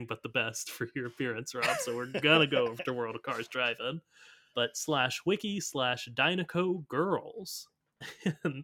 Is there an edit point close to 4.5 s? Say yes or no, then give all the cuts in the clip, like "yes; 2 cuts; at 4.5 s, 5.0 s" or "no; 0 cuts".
yes; 1 cut; at 4.5 s